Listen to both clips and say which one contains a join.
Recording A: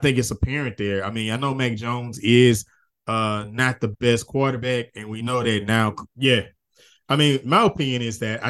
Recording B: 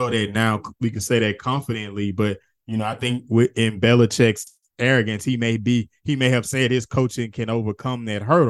A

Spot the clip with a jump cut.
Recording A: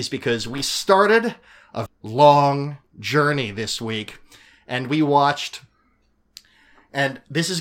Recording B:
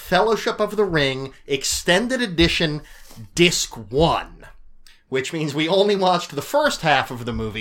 A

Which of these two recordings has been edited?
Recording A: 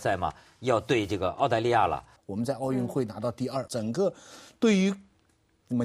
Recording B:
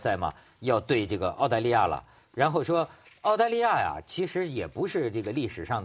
A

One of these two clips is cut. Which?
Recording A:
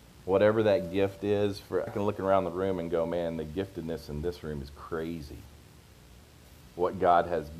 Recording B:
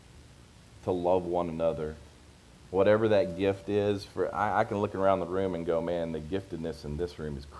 A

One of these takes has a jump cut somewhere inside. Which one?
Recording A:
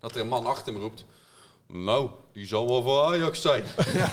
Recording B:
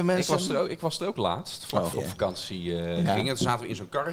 B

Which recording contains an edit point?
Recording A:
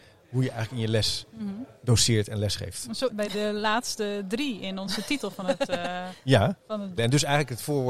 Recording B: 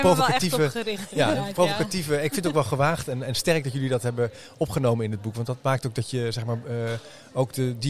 A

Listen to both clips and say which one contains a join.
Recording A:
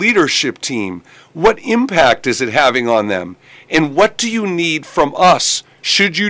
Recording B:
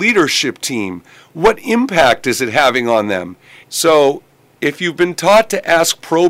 B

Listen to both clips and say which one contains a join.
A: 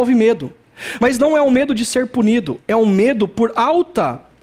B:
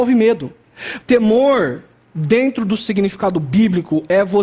B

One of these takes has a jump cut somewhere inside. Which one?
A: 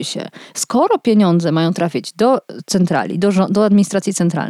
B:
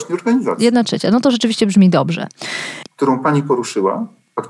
B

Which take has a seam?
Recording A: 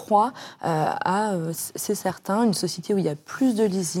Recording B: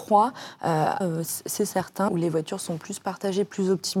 B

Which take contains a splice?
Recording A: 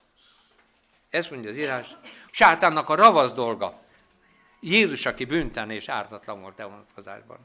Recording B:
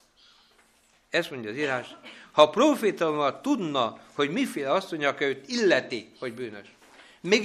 A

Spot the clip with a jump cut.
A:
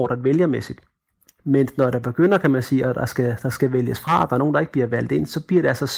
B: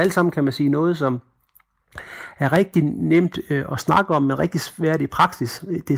A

